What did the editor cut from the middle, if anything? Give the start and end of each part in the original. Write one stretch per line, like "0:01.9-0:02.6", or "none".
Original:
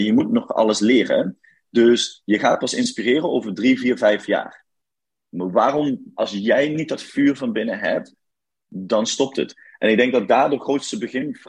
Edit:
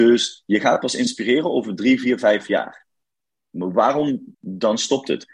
0:06.1-0:08.6